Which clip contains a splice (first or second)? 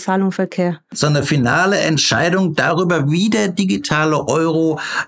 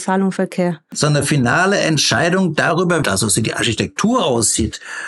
second